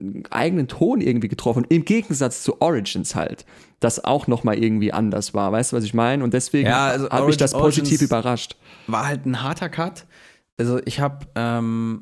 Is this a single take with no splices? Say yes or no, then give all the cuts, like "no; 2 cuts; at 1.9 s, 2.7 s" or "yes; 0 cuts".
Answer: yes; 0 cuts